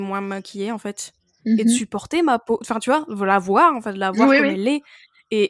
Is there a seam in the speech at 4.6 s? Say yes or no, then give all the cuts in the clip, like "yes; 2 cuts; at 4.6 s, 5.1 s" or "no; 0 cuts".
no; 0 cuts